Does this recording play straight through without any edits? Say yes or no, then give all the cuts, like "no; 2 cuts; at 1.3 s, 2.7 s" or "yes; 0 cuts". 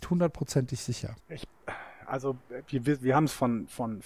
no; 1 cut; at 1.2 s